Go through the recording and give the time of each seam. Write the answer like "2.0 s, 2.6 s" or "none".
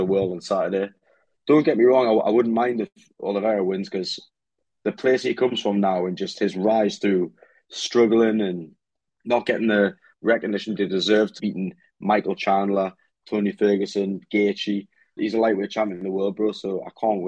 11.4 s, 15.2 s